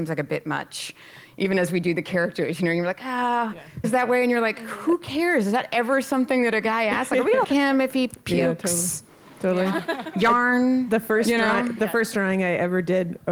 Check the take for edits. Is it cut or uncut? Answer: cut